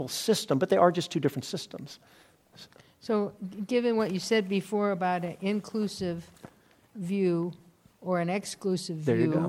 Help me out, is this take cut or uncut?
uncut